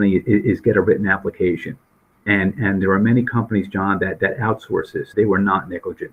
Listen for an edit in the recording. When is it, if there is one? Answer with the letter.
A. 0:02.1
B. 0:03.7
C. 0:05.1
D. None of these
C